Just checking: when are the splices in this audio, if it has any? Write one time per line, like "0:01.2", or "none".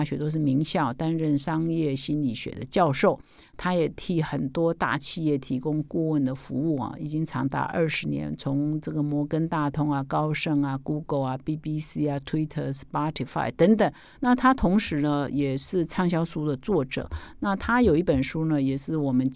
none